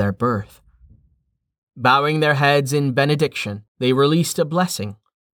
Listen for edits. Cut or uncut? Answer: cut